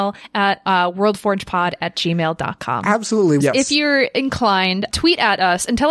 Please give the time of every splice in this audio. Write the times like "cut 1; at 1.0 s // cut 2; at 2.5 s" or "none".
cut 1; at 3.4 s // cut 2; at 4.9 s